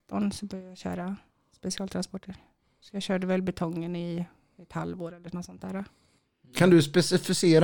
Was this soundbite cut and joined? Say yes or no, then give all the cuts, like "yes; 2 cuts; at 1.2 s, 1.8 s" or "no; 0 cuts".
no; 0 cuts